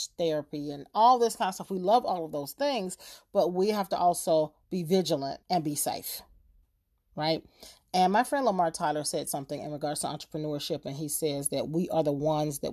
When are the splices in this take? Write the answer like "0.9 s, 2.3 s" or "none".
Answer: 5.4 s